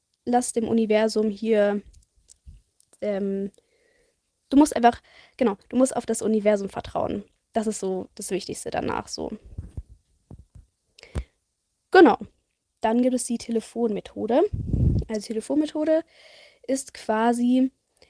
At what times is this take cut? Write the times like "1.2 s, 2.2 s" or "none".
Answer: none